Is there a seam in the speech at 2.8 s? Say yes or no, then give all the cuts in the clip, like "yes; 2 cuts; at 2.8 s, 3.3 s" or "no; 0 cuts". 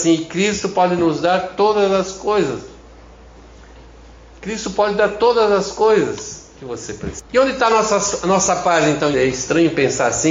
no; 2 cuts; at 7.3 s, 9.1 s